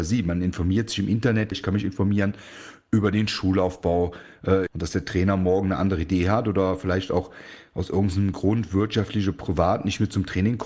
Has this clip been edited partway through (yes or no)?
yes